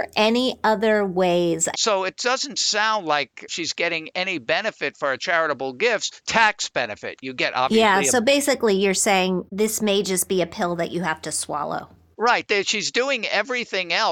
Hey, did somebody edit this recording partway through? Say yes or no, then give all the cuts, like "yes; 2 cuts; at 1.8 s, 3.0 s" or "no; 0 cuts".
yes; 1 cut; at 1.7 s